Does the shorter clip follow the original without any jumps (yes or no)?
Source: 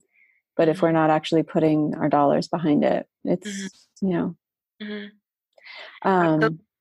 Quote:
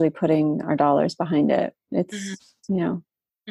yes